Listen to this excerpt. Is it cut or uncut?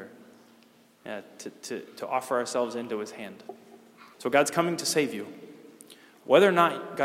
cut